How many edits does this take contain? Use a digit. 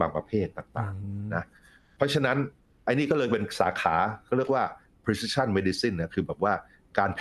0